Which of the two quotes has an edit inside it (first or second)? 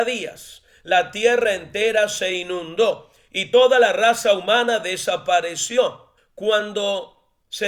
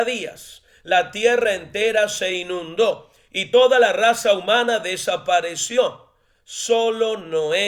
first